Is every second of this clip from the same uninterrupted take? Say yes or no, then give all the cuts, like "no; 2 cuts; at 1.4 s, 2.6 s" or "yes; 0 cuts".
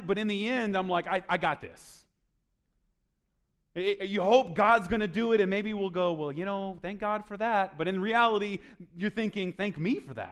yes; 0 cuts